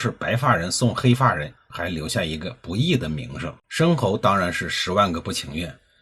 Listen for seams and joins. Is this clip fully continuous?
no; 2 cuts; at 1.6 s, 3.6 s

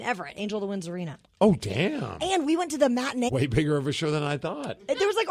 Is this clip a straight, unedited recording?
no; 1 cut; at 3.3 s

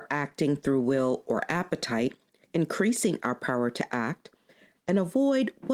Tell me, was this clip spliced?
yes; 1 cut; at 2.4 s

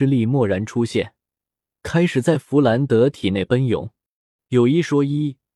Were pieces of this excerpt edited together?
yes; 1 cut; at 4.4 s

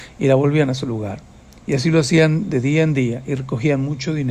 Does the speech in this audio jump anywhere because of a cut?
no; 0 cuts

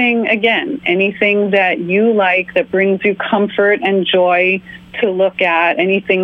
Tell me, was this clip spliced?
no; 0 cuts

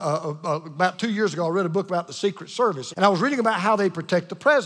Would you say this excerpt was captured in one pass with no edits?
no; 1 cut; at 2.9 s

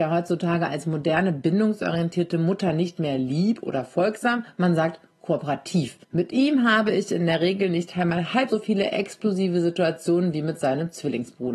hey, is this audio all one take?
no; 2 cuts; at 6.0 s, 8.5 s

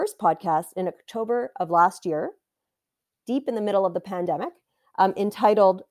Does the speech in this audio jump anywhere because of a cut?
no; 0 cuts

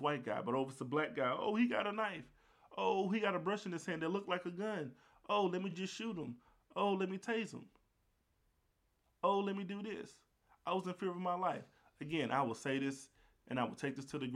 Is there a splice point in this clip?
no; 0 cuts

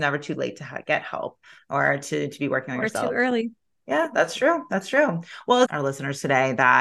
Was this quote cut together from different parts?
yes; 1 cut; at 5.6 s

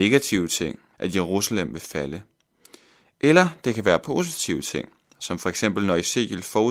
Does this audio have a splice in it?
yes; 1 cut; at 0.9 s

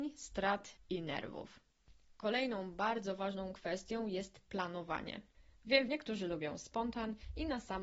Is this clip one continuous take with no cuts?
no; 1 cut; at 5.9 s

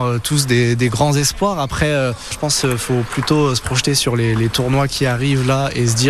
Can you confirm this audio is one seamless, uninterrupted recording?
yes; 0 cuts

